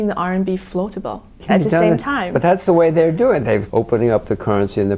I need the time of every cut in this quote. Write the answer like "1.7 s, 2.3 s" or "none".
1.4 s, 3.7 s